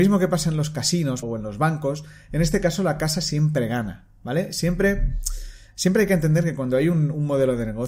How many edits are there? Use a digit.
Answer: 1